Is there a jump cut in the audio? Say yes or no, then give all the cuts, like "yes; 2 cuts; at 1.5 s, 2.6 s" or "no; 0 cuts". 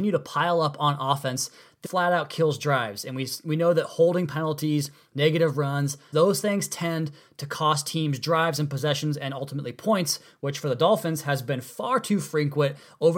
yes; 2 cuts; at 1.8 s, 6.1 s